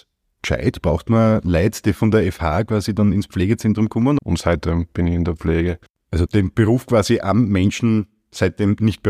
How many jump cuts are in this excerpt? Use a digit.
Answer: 3